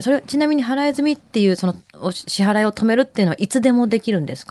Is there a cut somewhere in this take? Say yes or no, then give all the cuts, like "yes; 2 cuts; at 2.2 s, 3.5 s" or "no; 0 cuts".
no; 0 cuts